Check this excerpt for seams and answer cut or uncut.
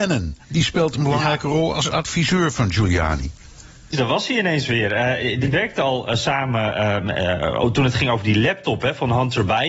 cut